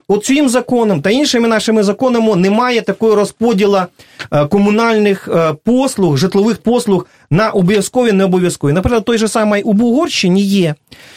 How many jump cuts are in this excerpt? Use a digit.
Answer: 1